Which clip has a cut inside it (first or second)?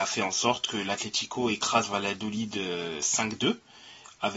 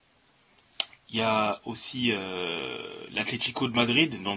second